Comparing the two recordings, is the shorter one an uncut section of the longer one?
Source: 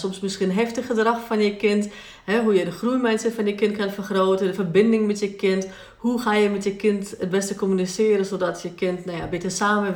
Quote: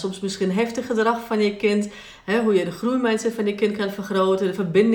yes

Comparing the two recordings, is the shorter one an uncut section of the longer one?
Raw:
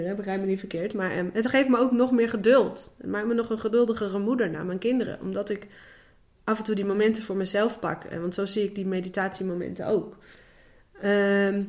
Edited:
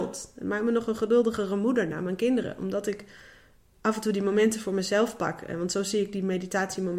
yes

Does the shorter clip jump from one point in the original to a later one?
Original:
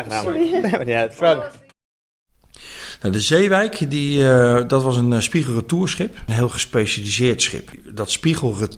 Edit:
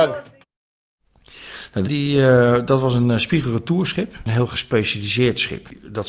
yes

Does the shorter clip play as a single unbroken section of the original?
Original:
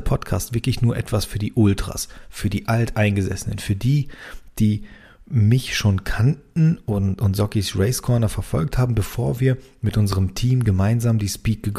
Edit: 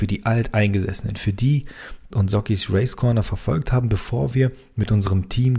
no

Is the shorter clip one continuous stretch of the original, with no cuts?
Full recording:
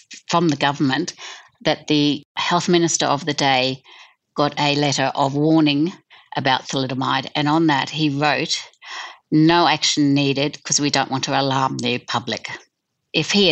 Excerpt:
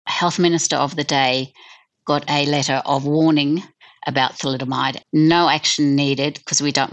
no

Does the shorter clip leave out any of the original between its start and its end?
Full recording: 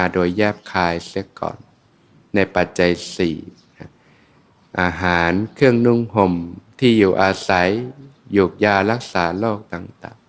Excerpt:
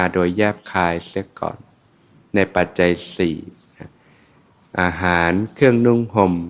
no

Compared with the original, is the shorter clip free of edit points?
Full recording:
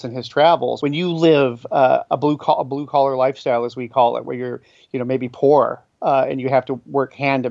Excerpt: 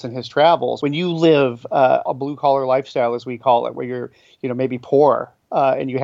no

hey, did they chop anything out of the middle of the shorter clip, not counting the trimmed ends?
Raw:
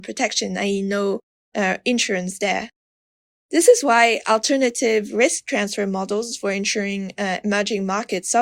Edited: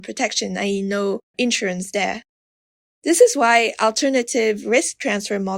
yes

